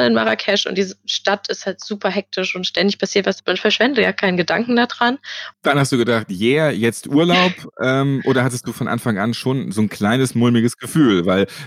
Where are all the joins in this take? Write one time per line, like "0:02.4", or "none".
0:05.5